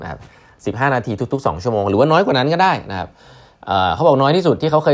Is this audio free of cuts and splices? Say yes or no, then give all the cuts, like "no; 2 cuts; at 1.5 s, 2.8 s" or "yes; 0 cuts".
yes; 0 cuts